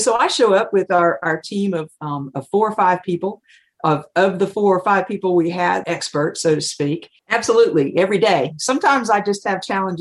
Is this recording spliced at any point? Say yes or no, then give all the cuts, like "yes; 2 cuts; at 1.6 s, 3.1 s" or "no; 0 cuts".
yes; 2 cuts; at 5.8 s, 7.2 s